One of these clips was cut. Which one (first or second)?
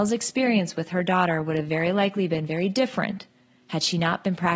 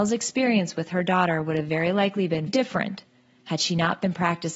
second